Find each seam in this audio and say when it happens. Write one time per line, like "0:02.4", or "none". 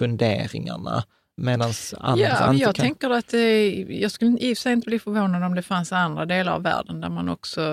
none